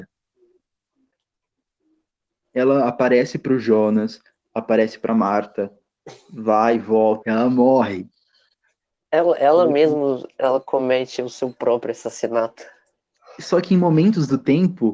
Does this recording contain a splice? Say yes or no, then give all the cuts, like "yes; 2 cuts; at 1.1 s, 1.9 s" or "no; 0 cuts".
yes; 1 cut; at 7.2 s